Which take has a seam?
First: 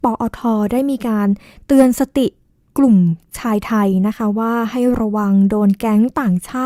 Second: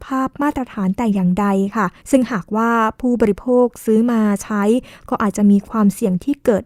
second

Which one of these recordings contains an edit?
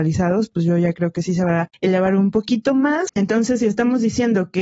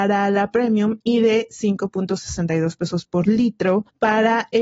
first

